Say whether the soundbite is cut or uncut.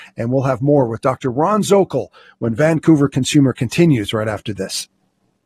uncut